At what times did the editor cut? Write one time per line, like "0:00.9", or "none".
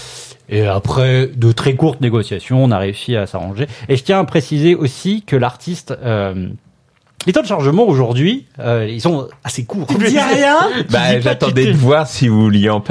0:07.2
0:09.9